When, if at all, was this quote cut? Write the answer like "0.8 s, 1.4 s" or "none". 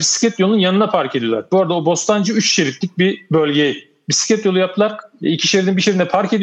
5.2 s